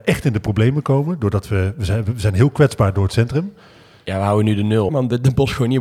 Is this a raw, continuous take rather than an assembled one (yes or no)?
no